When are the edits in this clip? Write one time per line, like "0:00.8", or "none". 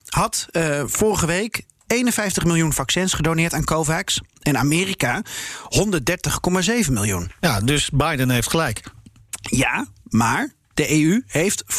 none